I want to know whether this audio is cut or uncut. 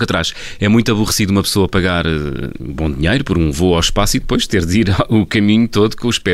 uncut